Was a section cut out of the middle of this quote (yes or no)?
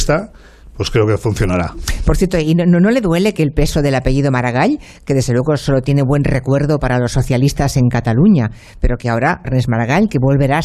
yes